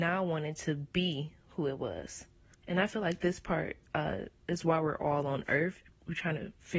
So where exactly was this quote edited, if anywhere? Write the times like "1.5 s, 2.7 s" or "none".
2.5 s